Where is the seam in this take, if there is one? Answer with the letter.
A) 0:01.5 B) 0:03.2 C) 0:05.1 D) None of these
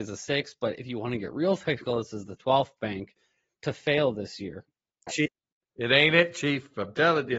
C